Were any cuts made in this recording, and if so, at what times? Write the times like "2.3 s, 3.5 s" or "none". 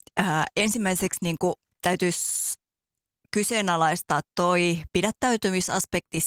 none